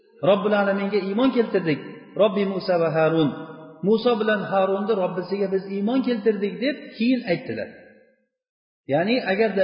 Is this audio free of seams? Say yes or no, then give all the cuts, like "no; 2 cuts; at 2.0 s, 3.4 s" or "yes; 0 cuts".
yes; 0 cuts